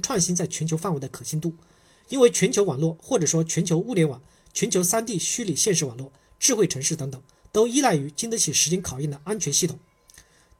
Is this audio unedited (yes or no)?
yes